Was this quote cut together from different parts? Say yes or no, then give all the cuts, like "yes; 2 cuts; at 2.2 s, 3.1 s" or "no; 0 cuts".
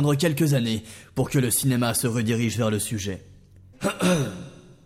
yes; 1 cut; at 3.7 s